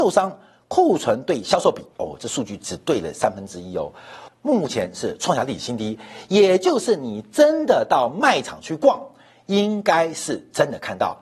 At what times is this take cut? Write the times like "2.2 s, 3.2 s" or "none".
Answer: 1.9 s, 4.3 s